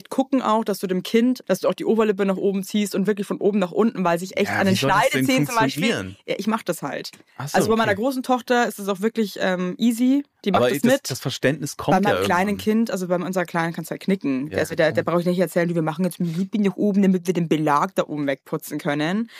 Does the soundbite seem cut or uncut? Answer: cut